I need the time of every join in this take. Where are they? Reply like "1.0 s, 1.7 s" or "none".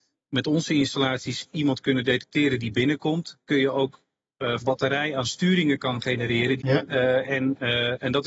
4.6 s, 6.6 s